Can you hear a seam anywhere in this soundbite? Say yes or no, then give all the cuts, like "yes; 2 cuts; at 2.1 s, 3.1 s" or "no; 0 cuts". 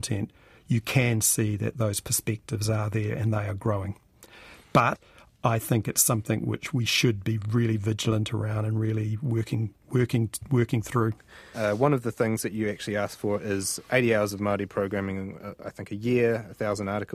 yes; 1 cut; at 11.5 s